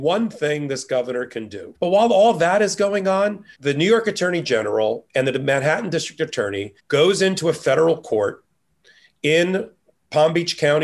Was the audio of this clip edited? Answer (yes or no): yes